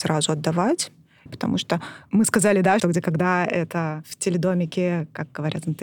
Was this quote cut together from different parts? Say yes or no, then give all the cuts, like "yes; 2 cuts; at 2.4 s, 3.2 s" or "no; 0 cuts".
yes; 2 cuts; at 1.3 s, 2.8 s